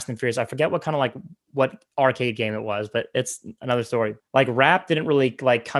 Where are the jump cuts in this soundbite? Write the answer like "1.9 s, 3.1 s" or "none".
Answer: 4.2 s